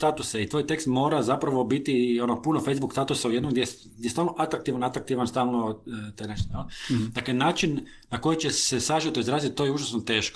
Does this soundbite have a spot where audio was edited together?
no; 0 cuts

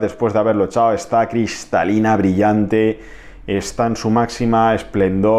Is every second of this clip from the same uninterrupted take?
yes; 0 cuts

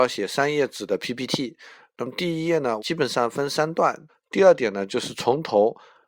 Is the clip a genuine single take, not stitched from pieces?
no; 2 cuts; at 2.8 s, 4.1 s

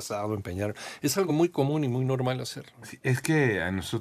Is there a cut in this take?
no; 0 cuts

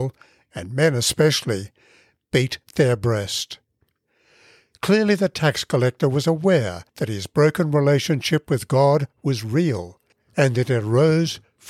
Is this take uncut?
yes; 0 cuts

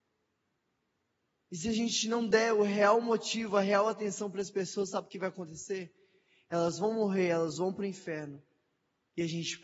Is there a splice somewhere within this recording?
no; 0 cuts

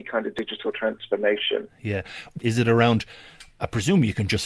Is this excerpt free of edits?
no; 1 cut; at 2.4 s

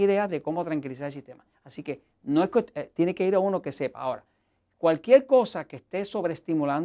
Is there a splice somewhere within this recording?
yes; 1 cut; at 1.5 s

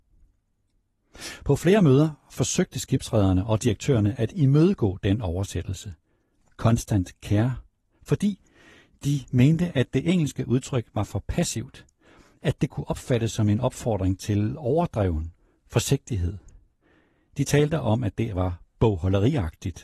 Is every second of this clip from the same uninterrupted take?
yes; 0 cuts

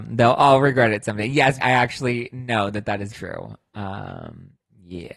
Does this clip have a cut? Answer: yes; 2 cuts; at 1.6 s, 3.1 s

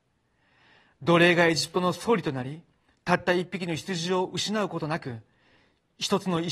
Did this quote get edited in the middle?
no; 0 cuts

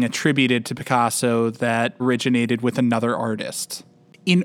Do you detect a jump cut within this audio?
yes; 1 cut; at 2.0 s

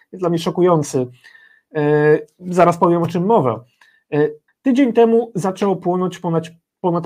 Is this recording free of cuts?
no; 1 cut; at 4.5 s

